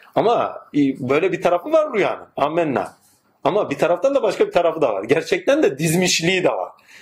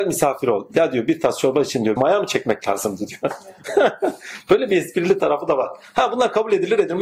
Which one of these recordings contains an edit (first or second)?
second